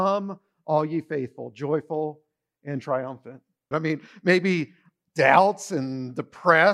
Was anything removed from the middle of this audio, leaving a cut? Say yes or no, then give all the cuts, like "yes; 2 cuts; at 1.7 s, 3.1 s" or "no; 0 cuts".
yes; 1 cut; at 3.7 s